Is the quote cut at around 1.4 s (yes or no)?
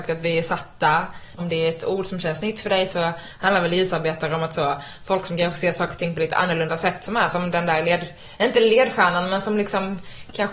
yes